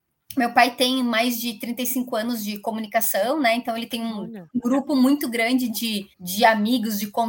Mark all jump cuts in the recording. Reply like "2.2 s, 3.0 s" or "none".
6.1 s